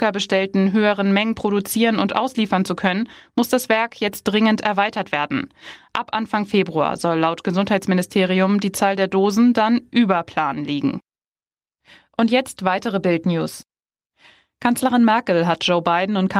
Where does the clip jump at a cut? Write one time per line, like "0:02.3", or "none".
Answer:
none